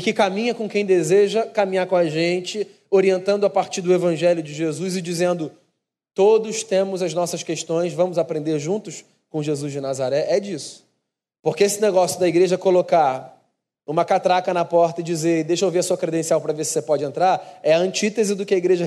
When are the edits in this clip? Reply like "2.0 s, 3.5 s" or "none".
none